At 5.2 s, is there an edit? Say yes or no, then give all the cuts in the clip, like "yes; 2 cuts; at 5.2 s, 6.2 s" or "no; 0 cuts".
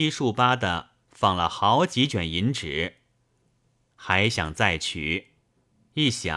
no; 1 cut; at 3.9 s